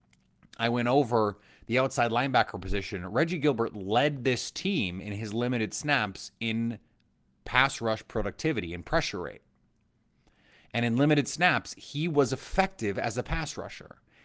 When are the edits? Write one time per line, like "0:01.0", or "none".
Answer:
none